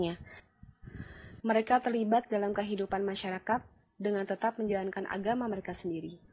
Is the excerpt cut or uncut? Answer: cut